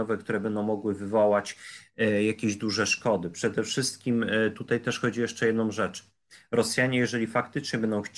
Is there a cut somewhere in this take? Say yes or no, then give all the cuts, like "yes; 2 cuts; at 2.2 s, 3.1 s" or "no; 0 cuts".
no; 0 cuts